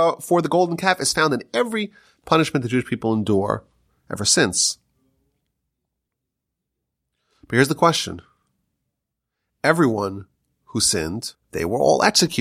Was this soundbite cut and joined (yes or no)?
yes